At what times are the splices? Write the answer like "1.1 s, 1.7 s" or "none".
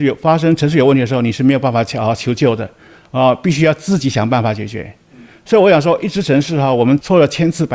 none